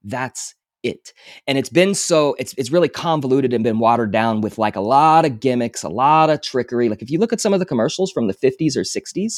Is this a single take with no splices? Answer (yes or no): yes